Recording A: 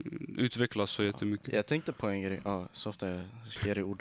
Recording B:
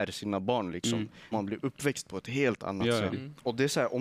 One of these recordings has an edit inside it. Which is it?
B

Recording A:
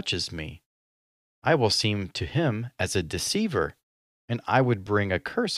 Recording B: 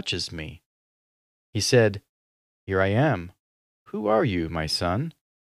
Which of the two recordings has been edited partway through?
B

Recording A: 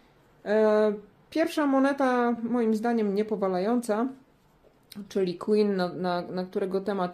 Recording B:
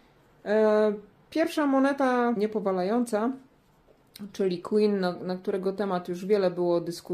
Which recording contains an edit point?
B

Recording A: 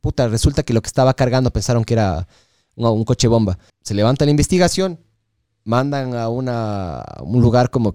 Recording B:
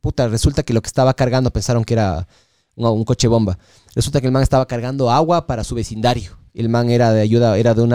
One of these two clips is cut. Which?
A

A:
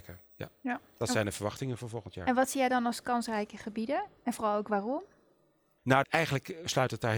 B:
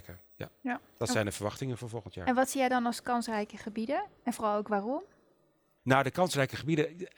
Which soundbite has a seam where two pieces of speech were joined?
A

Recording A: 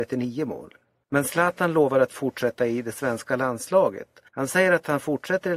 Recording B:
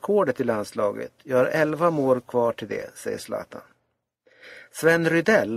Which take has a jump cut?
A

